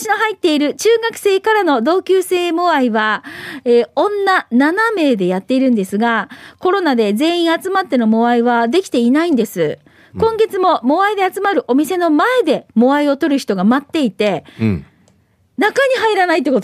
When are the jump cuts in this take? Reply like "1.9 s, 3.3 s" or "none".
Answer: none